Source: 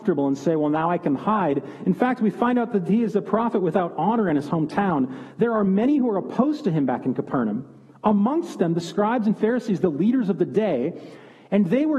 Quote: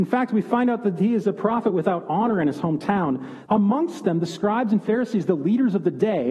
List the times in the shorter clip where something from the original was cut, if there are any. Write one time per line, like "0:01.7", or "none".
0:03.5